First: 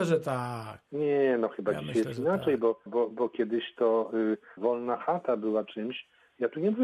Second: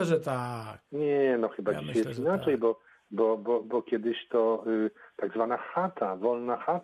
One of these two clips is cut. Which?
first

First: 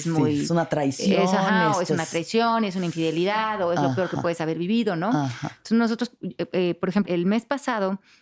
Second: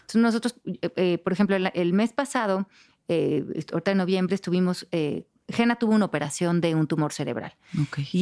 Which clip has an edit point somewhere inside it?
first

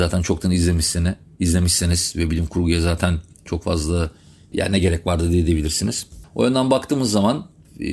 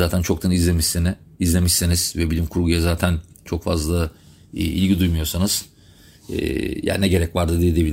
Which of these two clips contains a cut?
first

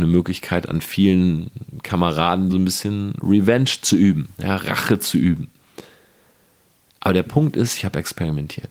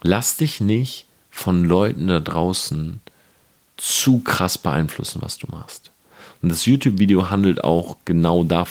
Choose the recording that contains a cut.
first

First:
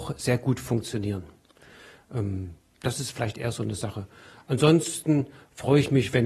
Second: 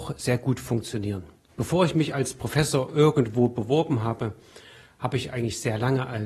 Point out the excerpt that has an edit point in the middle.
second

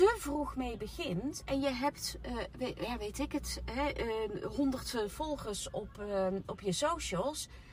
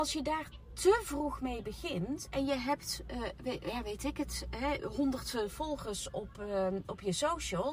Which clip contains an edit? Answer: second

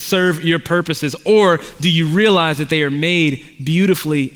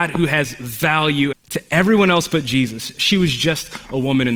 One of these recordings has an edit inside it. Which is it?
second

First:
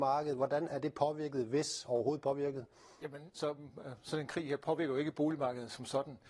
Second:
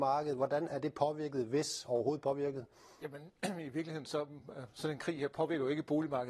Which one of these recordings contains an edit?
first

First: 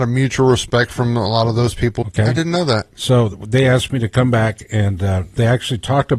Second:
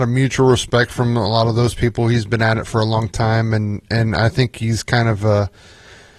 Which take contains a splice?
first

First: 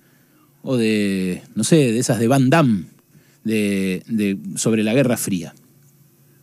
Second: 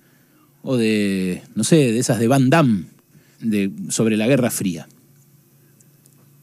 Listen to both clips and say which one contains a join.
second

